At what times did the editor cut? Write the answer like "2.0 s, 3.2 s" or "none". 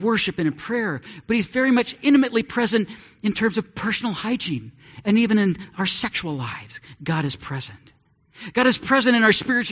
none